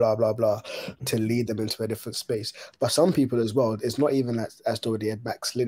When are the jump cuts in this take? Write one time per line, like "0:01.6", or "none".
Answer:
0:01.0